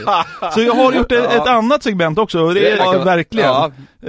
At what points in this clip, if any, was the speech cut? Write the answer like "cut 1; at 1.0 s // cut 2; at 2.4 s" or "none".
cut 1; at 2.8 s